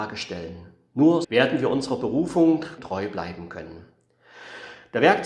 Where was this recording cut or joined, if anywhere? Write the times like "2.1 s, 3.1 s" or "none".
1.2 s, 2.8 s